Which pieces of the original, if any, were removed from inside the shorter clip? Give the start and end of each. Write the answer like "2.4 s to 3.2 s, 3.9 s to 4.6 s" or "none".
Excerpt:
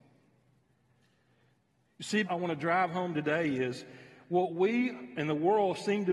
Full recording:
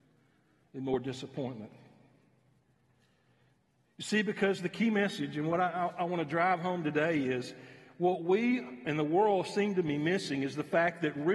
4.2 s to 5.9 s